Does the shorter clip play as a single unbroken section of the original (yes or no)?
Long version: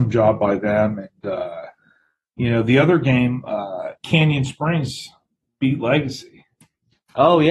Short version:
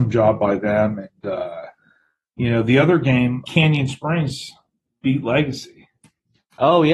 no